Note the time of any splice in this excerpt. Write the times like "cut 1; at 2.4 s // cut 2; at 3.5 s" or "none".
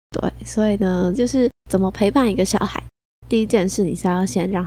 cut 1; at 1.2 s // cut 2; at 3.2 s